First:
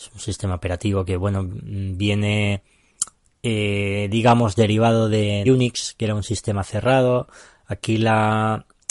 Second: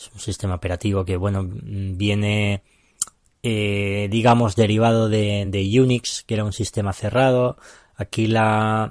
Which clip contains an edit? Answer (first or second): first